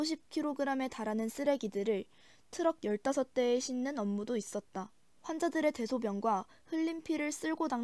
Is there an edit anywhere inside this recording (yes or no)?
yes